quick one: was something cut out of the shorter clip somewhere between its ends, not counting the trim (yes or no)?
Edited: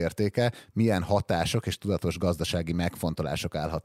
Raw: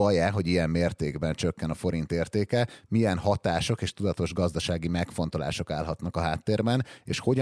no